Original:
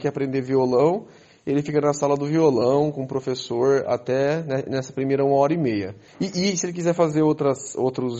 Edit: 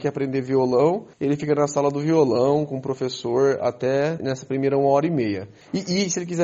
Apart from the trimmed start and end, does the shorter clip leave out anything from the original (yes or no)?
yes